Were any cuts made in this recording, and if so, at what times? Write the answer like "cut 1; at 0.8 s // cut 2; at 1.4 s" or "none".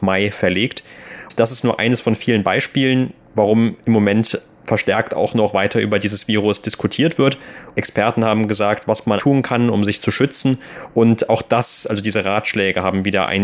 cut 1; at 7.7 s // cut 2; at 9.2 s